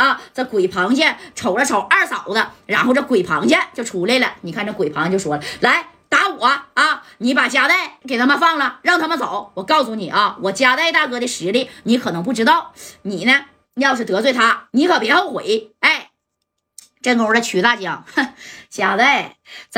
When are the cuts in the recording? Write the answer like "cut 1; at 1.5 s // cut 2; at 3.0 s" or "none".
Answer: cut 1; at 8.0 s